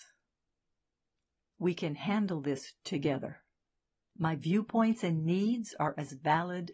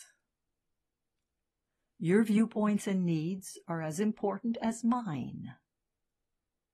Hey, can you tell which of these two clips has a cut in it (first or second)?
first